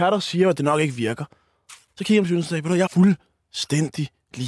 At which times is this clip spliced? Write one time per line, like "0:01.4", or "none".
0:02.9